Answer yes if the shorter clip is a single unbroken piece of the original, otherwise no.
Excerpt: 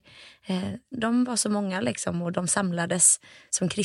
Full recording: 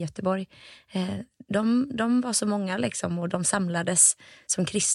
no